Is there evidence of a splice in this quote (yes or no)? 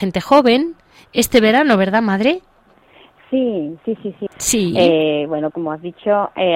yes